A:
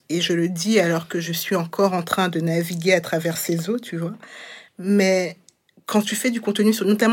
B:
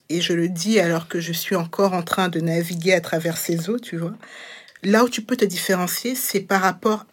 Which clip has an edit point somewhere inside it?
B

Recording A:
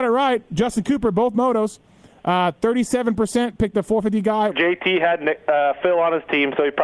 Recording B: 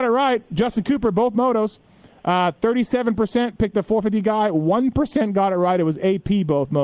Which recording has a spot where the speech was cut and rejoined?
A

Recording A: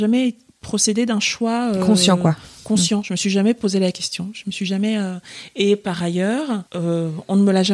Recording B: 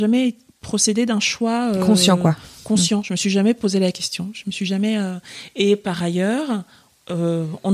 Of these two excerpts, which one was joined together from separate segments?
A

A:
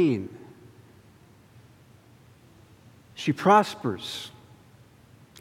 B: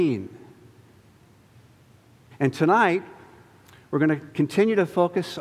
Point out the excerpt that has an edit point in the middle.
B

